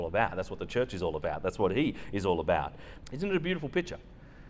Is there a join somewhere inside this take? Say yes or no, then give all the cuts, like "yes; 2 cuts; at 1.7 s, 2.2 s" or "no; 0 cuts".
yes; 1 cut; at 3.0 s